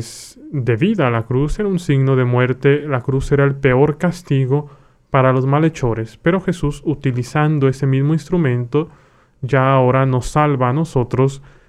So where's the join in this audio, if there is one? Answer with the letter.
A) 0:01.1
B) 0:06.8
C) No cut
C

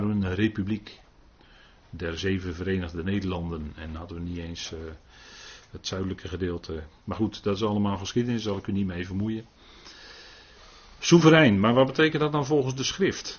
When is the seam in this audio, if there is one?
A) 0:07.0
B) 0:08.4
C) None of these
A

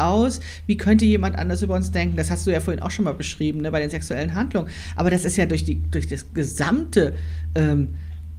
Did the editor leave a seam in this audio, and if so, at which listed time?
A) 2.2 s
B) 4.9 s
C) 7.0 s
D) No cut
D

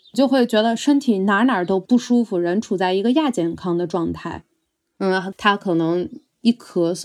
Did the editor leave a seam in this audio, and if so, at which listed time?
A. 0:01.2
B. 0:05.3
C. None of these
B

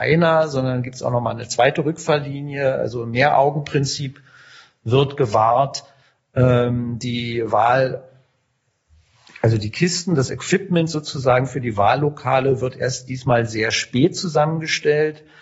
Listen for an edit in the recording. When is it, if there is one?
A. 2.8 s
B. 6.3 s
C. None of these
C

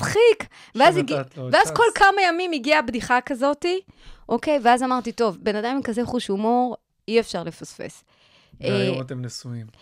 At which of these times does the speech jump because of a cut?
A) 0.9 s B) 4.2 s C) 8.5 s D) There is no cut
D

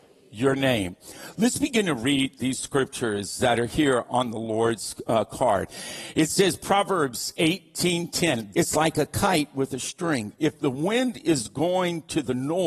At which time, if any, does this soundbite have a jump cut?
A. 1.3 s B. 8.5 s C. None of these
B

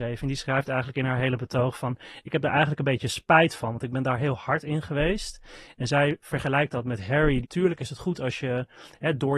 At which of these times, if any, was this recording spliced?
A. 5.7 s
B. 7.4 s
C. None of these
B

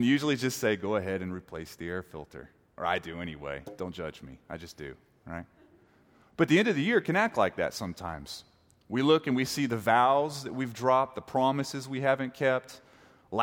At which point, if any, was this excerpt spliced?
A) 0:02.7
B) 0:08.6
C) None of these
C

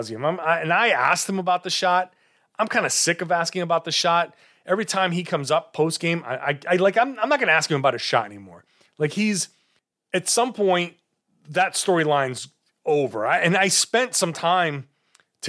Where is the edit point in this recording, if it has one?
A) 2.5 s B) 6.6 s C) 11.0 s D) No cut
D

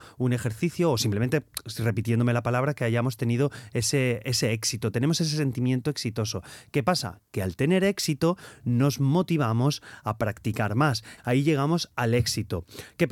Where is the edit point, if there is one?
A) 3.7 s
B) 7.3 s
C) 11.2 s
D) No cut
C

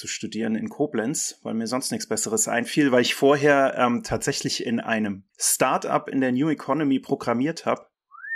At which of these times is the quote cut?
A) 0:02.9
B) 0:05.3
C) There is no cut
B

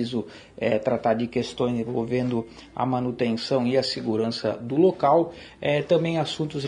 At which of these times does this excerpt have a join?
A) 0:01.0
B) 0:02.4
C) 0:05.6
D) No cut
D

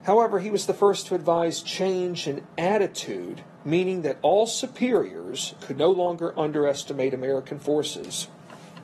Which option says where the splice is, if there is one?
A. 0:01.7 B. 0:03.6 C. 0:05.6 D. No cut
C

